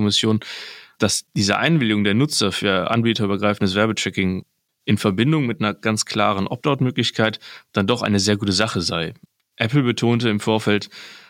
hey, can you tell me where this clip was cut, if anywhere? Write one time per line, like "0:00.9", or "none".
none